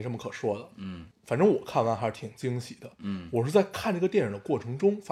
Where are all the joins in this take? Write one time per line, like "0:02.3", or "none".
0:01.1